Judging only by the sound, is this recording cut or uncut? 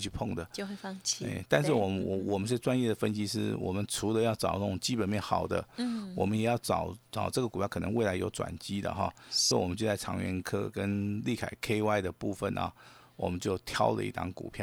cut